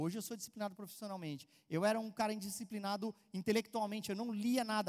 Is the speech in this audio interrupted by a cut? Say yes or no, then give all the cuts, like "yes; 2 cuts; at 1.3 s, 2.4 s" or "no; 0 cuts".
no; 0 cuts